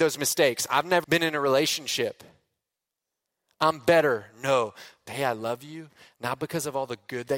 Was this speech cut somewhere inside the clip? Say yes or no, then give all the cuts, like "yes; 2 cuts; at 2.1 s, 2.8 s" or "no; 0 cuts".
yes; 2 cuts; at 1.0 s, 5.1 s